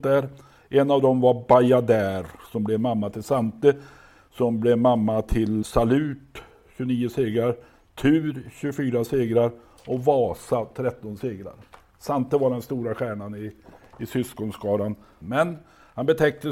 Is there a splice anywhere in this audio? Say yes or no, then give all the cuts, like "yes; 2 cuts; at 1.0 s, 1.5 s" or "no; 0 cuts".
yes; 2 cuts; at 5.6 s, 15.2 s